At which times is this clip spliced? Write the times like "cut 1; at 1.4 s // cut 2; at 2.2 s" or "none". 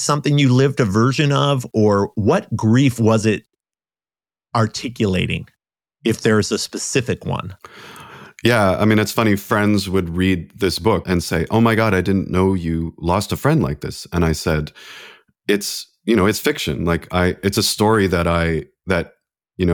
cut 1; at 11.0 s